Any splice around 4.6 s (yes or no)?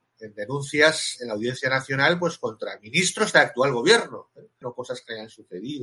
yes